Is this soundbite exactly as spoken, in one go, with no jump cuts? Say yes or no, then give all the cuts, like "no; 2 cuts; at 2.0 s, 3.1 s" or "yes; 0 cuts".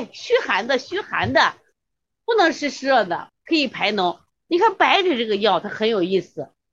no; 1 cut; at 3.3 s